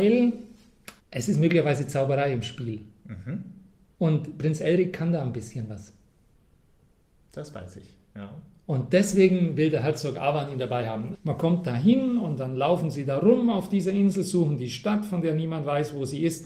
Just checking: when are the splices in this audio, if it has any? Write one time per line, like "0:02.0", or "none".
0:01.0
0:11.1